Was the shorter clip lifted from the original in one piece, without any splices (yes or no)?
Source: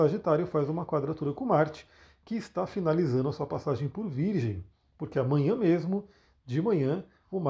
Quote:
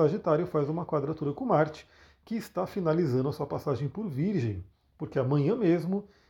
yes